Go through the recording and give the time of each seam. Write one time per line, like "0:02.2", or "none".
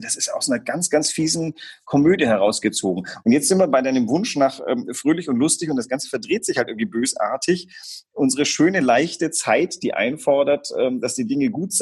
none

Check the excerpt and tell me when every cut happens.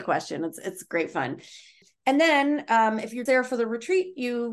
0:03.3

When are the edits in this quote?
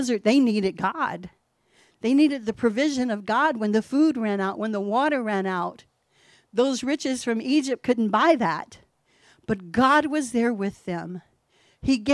none

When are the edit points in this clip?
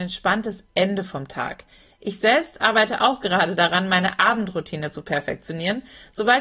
none

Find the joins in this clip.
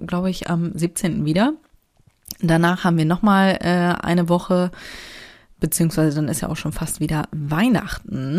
none

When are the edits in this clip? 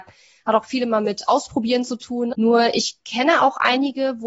0:02.3

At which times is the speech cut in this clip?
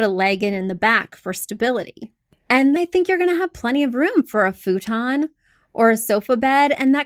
0:02.8

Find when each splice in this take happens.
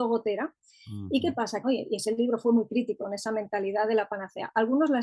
0:01.6
0:03.0

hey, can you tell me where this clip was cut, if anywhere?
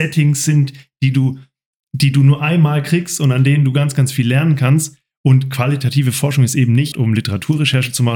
0:06.9

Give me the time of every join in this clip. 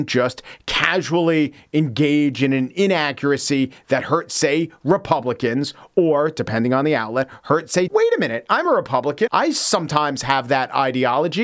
0:07.9
0:09.3

